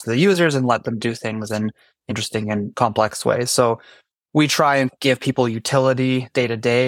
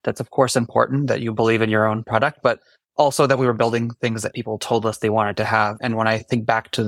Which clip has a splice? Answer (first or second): first